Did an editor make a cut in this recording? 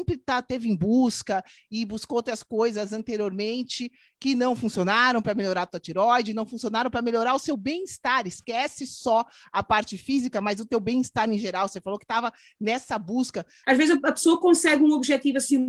yes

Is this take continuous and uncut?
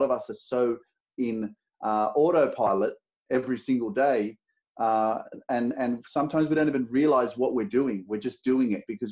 yes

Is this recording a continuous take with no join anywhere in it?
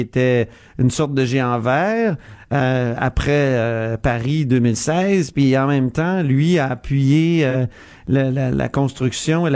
yes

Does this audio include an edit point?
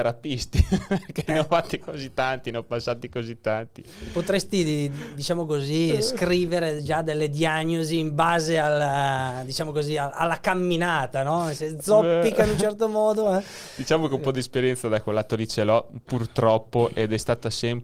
no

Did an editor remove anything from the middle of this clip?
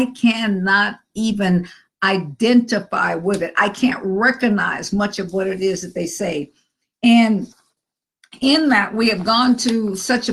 no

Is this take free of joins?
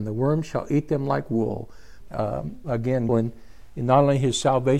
no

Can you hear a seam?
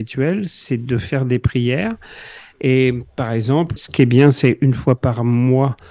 yes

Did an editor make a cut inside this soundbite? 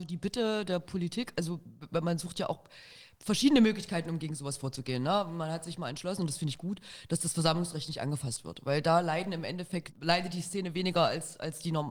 no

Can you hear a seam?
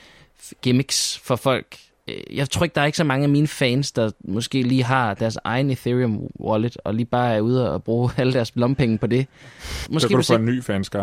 yes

